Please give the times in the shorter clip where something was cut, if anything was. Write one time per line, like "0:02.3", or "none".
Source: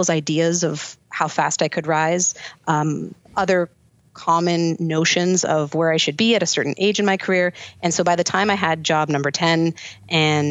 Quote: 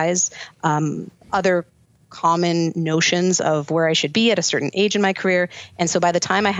none